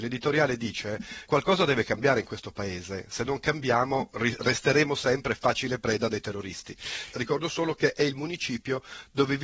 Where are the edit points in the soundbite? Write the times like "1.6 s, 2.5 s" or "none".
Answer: 1.2 s, 7.1 s